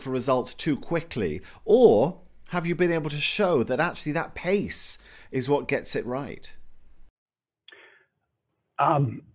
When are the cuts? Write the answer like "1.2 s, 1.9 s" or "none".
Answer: none